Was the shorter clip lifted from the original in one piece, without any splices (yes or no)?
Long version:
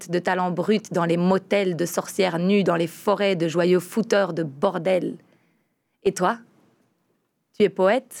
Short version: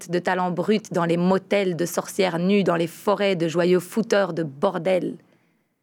yes